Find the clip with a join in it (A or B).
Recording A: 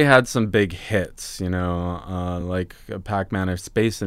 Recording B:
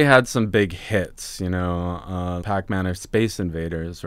B